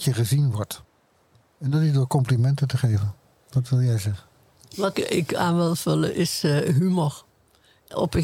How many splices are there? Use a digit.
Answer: 1